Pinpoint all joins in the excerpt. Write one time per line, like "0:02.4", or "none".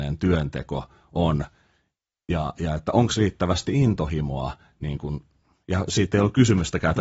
none